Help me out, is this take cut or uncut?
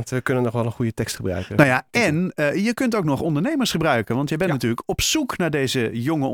uncut